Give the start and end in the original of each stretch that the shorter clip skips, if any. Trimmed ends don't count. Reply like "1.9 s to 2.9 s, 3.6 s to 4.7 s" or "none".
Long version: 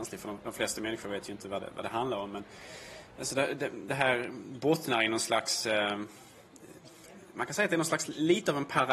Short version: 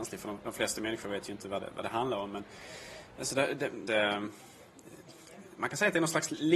3.9 s to 5.6 s